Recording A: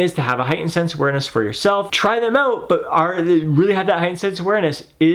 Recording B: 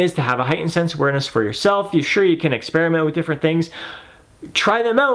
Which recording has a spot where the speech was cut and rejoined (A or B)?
A